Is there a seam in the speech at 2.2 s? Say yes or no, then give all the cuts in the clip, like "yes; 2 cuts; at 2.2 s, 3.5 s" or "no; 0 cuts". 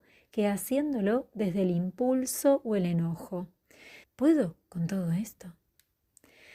no; 1 cut; at 4.0 s